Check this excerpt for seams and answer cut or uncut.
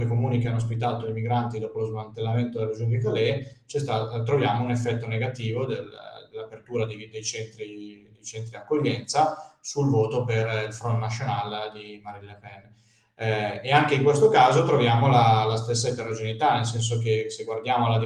uncut